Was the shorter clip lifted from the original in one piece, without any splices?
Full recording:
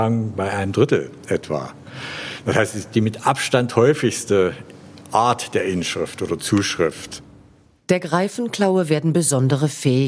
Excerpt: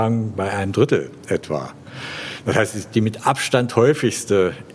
yes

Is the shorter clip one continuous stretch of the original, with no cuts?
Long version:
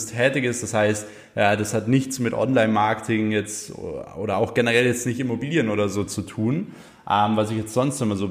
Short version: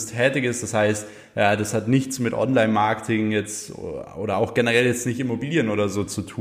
yes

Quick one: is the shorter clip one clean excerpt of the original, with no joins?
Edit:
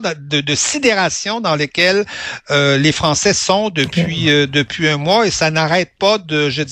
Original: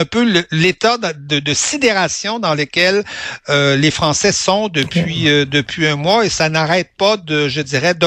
yes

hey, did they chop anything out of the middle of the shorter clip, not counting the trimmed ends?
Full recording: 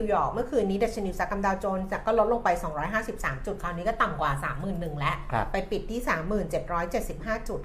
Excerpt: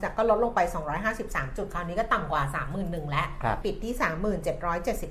yes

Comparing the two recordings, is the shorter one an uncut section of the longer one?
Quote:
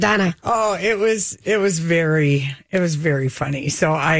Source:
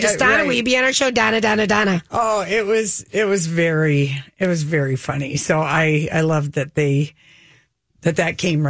yes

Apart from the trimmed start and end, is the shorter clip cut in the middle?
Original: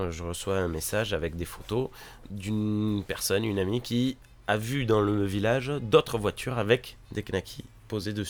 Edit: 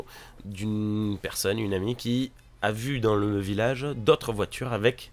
no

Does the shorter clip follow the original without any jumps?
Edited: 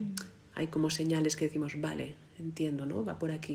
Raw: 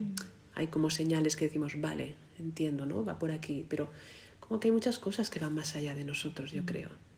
yes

